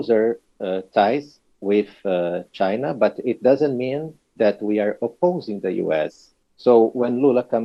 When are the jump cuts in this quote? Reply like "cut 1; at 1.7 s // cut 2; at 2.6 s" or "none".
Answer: cut 1; at 6.4 s